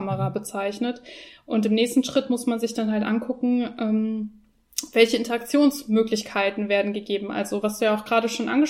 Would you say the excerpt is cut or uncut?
uncut